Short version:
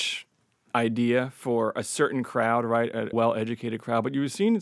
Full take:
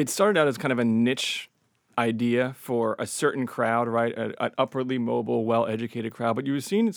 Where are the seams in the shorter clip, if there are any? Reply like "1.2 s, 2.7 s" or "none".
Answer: 3.1 s